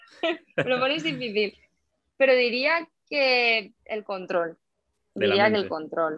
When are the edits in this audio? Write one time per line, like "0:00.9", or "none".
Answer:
none